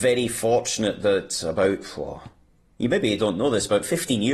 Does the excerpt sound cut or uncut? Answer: uncut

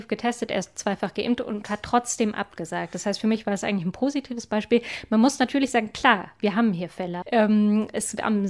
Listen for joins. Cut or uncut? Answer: cut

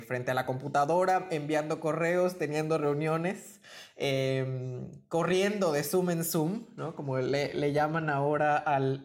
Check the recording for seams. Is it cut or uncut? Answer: uncut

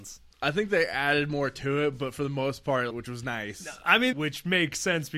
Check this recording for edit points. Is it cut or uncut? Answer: cut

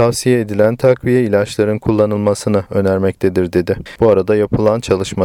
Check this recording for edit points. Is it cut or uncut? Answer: cut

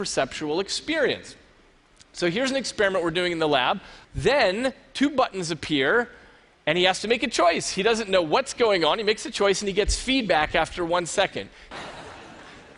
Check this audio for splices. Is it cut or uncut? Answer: cut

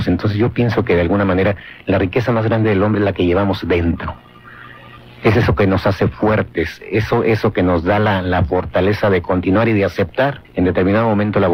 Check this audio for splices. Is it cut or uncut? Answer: cut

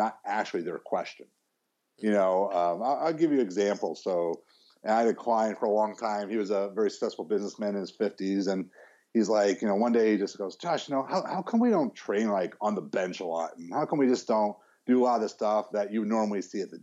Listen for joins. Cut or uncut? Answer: cut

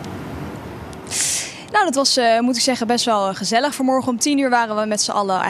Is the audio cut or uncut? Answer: uncut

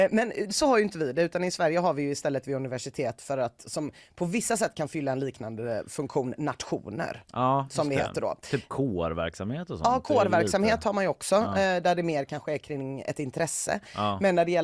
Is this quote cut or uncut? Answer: uncut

